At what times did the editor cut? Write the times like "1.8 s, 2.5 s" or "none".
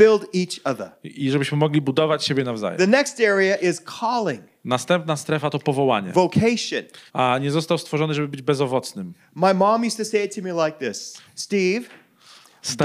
7.1 s, 11.3 s

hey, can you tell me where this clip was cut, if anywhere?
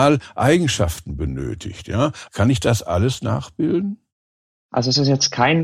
2.3 s

